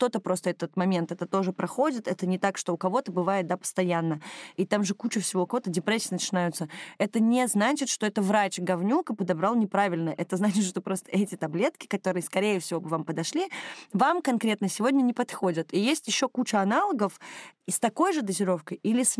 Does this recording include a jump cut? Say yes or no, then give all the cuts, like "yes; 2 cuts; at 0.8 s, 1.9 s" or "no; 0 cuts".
no; 0 cuts